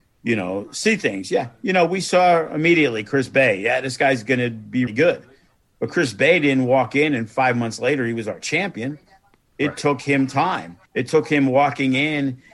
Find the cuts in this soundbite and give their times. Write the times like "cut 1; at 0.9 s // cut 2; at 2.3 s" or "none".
cut 1; at 4.9 s // cut 2; at 10.9 s